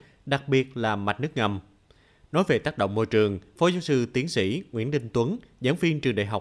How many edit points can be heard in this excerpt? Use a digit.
0